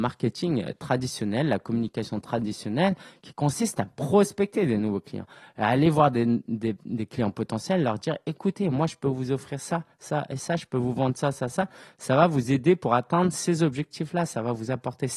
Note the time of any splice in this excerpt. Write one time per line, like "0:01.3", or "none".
none